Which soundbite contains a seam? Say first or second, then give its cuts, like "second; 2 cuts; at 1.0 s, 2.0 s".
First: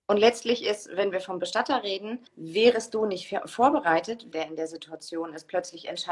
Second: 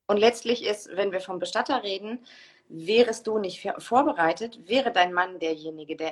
first; 2 cuts; at 2.3 s, 4.3 s